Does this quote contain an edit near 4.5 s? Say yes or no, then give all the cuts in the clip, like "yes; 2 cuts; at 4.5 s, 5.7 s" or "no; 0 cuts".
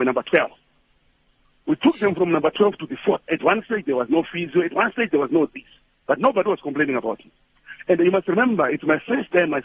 no; 1 cut; at 3.3 s